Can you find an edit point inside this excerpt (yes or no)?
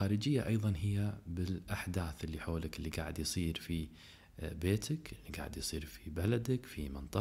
yes